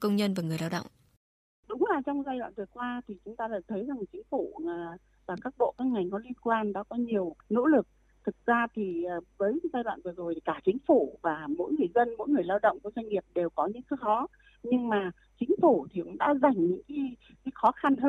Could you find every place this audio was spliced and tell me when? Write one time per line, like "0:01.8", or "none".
none